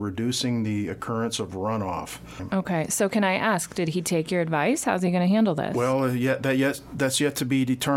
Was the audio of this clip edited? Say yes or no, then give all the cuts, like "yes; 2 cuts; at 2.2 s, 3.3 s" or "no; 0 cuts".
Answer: no; 0 cuts